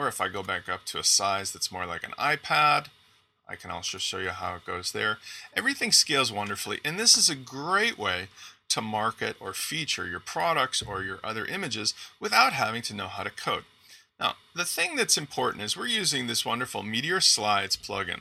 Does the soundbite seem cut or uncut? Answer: uncut